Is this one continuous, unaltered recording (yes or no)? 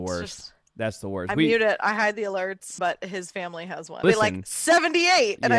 no